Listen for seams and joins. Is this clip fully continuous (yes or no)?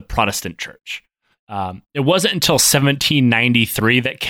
no